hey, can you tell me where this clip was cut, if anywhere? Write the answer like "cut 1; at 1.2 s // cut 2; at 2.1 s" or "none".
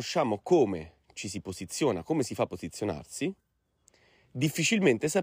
none